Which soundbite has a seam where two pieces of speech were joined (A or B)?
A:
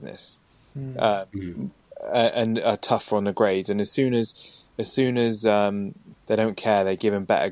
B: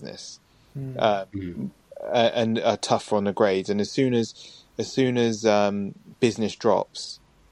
A